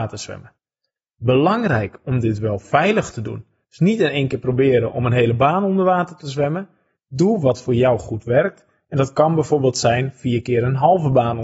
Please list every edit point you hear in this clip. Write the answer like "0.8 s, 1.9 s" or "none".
none